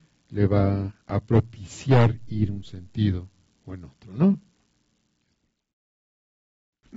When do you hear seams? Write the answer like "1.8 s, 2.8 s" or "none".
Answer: none